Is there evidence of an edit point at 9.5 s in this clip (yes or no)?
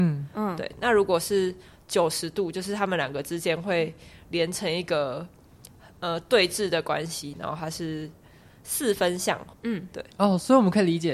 yes